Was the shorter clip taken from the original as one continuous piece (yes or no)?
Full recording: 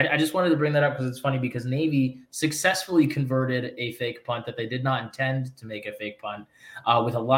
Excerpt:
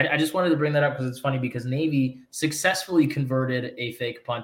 yes